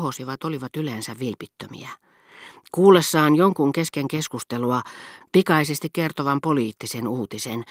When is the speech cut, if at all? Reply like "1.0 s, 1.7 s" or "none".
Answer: 5.2 s